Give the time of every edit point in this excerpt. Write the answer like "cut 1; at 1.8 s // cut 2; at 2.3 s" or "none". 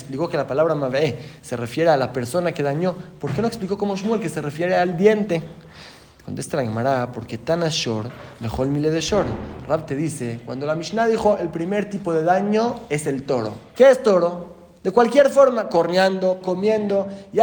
cut 1; at 13.7 s // cut 2; at 16.4 s